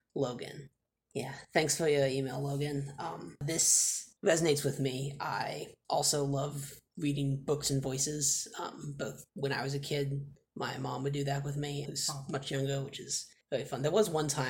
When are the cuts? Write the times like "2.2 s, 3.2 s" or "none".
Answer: 11.8 s